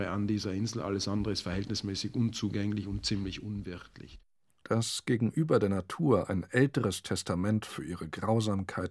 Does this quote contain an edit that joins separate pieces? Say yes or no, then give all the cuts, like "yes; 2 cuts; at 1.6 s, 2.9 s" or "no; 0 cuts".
no; 0 cuts